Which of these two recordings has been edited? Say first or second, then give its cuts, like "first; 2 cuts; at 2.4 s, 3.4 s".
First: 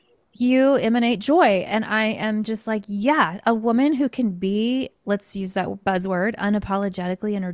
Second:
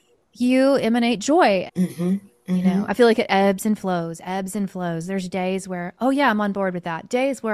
second; 1 cut; at 1.7 s